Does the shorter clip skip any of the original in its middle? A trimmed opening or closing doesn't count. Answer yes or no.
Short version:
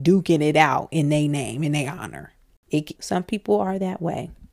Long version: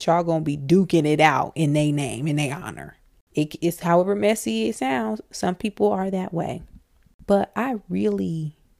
yes